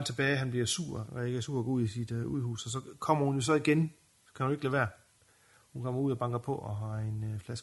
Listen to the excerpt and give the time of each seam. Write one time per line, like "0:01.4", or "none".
0:01.1